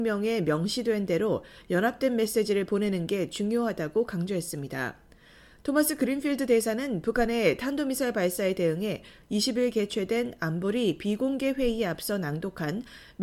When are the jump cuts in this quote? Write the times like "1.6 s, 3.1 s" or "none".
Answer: none